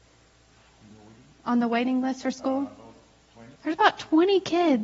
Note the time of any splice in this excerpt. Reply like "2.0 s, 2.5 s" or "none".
3.6 s